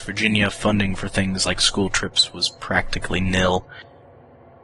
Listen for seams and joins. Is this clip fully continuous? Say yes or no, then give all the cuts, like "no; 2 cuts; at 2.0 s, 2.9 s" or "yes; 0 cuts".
yes; 0 cuts